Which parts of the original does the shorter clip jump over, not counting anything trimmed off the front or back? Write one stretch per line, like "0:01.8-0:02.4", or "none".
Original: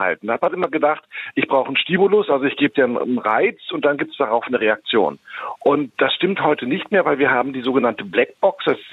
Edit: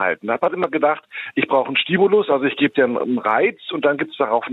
none